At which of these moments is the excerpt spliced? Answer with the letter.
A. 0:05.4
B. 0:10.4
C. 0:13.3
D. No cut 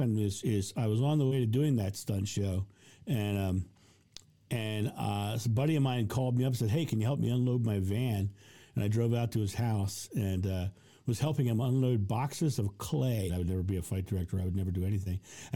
C